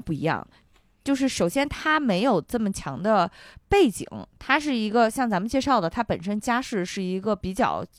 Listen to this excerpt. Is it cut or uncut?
uncut